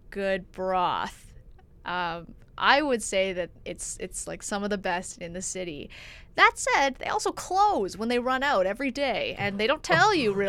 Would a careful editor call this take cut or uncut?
uncut